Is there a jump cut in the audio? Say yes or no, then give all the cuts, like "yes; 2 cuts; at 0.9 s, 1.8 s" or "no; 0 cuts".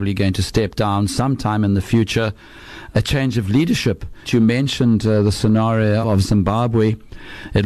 yes; 3 cuts; at 2.9 s, 4.3 s, 6.0 s